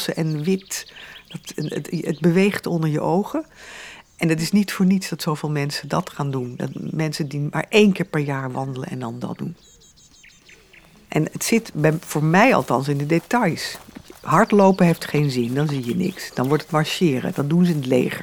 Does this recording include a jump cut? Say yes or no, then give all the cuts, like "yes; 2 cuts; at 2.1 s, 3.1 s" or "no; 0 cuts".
no; 0 cuts